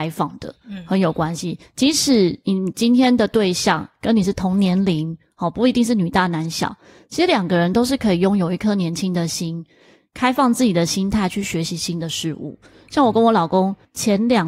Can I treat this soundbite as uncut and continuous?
yes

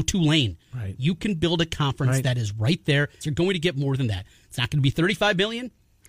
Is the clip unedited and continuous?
no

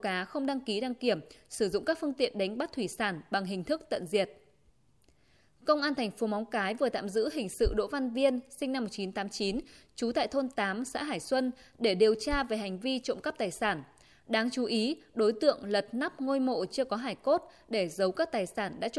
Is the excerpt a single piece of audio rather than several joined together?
yes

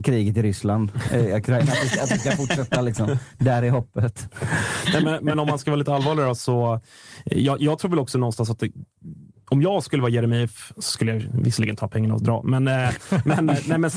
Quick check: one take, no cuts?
yes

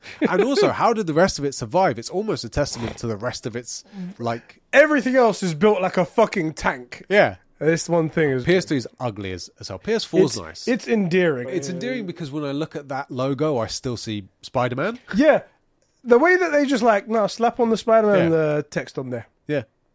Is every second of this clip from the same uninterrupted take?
no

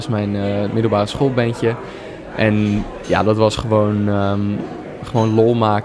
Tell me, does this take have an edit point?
no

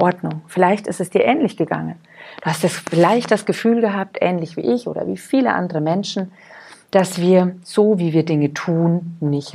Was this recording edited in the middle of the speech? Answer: no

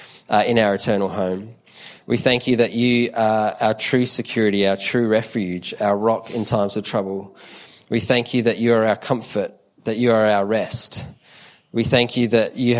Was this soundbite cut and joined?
no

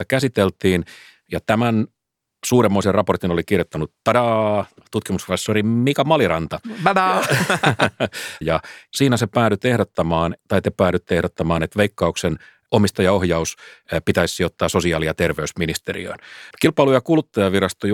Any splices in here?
yes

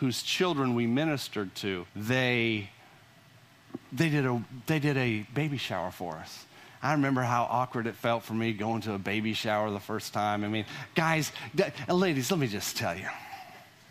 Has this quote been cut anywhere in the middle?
yes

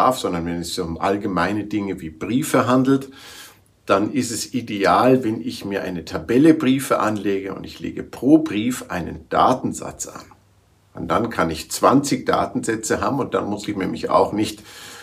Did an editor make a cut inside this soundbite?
no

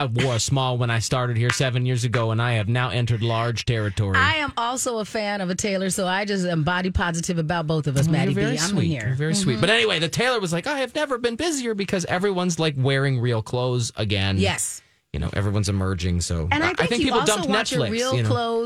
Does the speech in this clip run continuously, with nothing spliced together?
yes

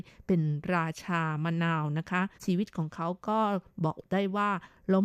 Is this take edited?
yes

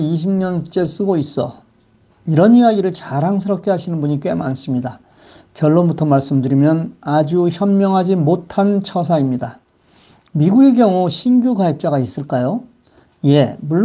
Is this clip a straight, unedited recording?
yes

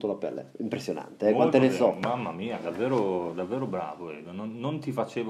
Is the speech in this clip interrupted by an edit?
no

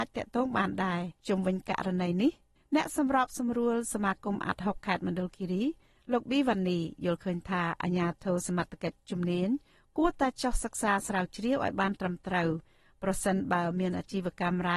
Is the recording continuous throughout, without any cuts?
no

